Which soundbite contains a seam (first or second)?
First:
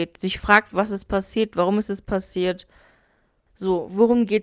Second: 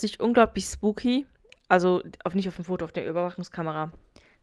first